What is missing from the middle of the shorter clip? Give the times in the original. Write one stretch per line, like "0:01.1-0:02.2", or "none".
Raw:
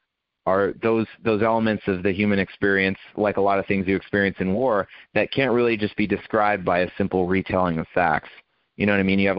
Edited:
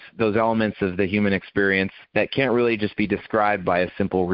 0:03.1-0:05.0